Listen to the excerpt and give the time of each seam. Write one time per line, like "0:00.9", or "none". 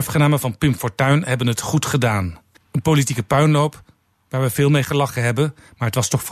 0:02.5